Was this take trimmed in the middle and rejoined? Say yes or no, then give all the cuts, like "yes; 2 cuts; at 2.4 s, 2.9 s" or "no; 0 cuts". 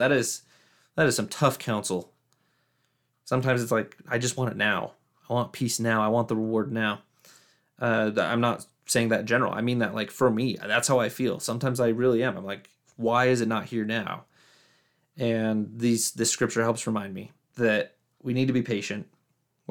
no; 0 cuts